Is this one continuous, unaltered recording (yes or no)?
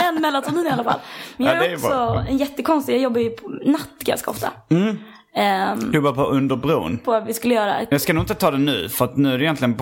no